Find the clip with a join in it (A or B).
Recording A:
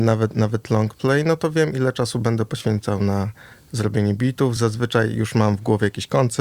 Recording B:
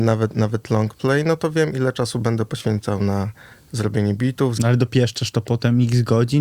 B